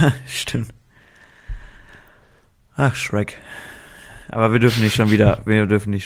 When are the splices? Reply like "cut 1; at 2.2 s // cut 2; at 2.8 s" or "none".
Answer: none

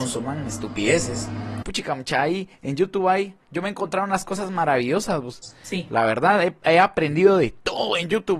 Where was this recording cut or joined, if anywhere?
cut 1; at 1.6 s

